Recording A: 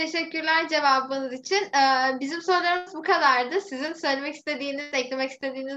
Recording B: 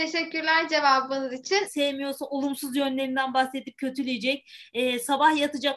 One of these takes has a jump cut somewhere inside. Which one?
B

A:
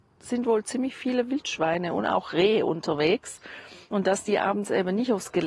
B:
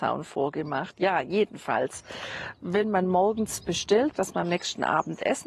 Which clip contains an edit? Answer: B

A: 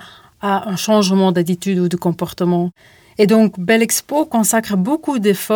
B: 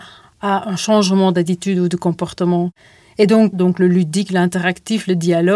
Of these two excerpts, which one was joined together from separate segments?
B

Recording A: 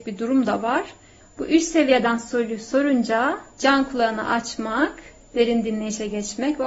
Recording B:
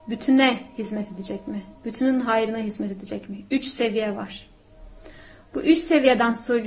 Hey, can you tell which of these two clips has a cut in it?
A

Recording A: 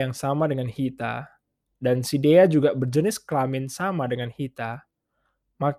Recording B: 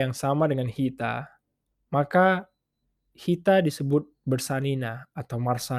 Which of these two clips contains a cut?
B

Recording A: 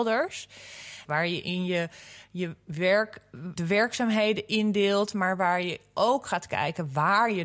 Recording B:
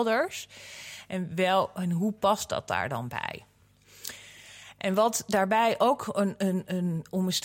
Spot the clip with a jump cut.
A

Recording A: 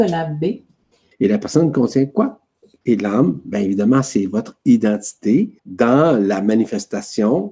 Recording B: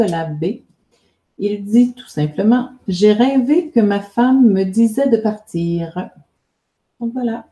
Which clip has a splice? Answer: A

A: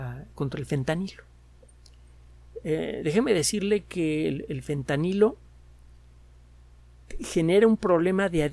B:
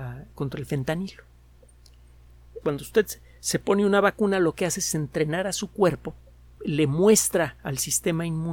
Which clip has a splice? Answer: B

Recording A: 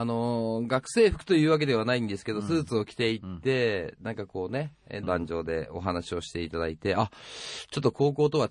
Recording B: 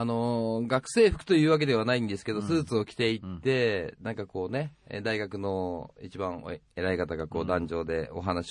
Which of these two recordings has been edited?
A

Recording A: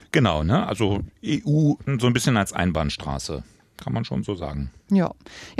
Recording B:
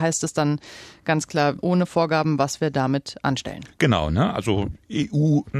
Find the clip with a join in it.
B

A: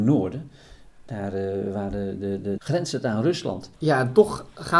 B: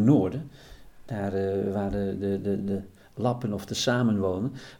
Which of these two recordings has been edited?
A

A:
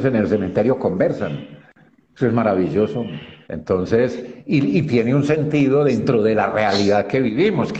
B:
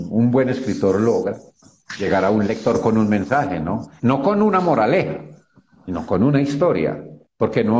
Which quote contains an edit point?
A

